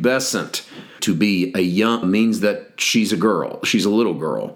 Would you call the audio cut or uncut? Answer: cut